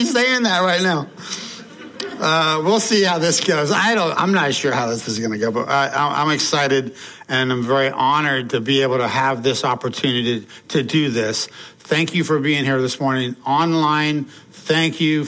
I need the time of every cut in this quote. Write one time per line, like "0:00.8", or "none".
none